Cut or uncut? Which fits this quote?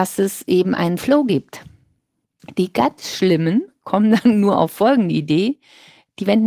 uncut